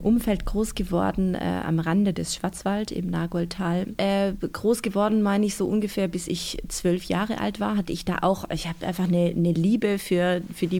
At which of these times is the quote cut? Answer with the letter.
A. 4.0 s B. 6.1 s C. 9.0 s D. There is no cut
A